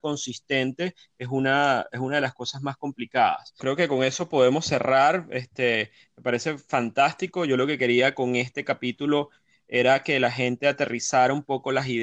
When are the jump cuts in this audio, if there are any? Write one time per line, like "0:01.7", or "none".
0:03.6